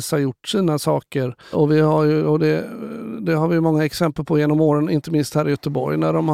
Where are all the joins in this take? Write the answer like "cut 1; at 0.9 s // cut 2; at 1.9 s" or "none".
cut 1; at 1.5 s